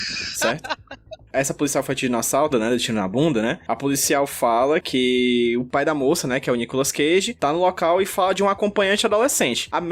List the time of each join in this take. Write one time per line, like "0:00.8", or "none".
0:02.5